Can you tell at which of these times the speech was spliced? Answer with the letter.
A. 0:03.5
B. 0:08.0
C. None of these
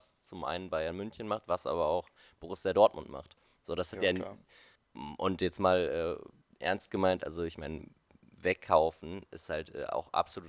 C